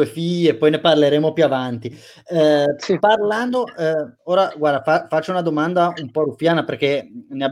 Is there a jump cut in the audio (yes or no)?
no